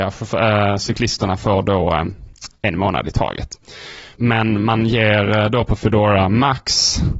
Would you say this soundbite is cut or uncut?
cut